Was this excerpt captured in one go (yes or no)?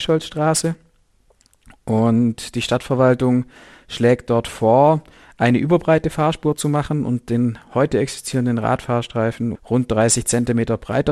no